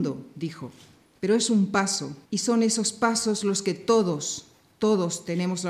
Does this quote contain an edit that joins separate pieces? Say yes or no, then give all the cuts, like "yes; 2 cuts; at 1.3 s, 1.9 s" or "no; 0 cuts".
yes; 1 cut; at 2.2 s